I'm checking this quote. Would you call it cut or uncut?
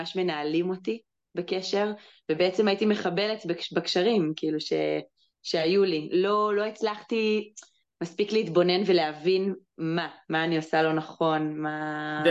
uncut